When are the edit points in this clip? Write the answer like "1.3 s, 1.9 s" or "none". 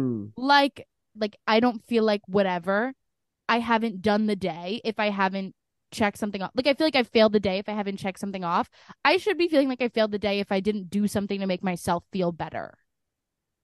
1.1 s